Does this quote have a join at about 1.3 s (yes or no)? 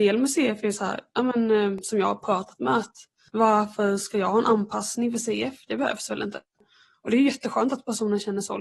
no